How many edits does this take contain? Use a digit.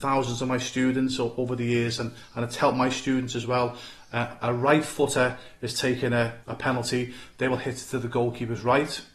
2